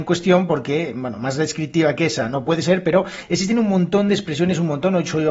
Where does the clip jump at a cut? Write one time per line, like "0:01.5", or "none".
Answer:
none